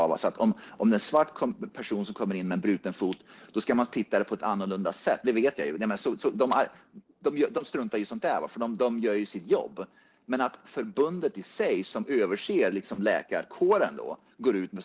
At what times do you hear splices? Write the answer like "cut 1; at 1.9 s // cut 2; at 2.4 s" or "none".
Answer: cut 1; at 5.2 s